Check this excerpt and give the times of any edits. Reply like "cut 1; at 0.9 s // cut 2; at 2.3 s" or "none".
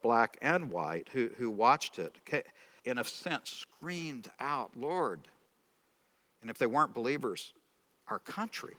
cut 1; at 2.8 s